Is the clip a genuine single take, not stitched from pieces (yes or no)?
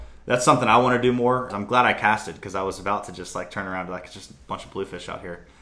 no